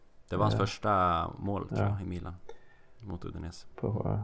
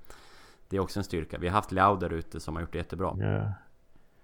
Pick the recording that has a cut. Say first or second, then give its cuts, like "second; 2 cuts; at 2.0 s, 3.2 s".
second; 1 cut; at 3.1 s